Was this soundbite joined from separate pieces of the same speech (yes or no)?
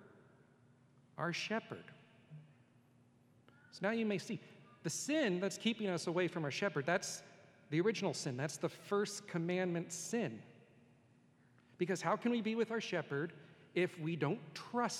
no